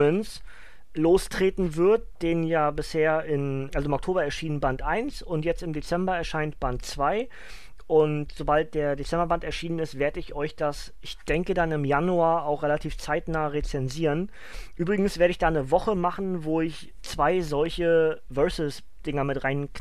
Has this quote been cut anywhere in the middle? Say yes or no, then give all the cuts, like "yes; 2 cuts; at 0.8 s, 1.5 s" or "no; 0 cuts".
yes; 1 cut; at 3.7 s